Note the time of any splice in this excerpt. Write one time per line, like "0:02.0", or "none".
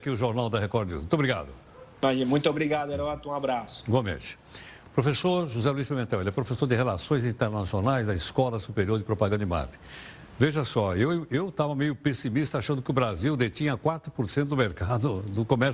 none